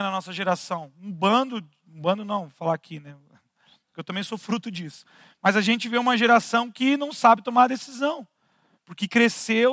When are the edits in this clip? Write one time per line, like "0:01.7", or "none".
none